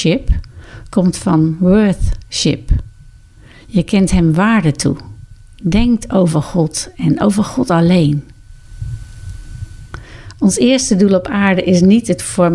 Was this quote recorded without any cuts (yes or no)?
yes